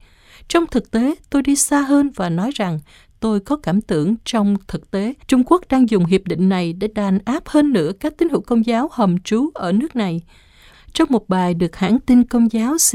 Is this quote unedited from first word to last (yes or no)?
no